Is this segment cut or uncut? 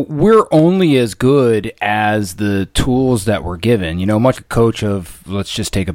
cut